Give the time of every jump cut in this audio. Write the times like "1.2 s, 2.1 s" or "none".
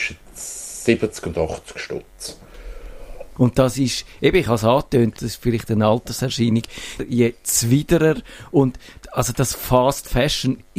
3.4 s, 5.2 s, 7.0 s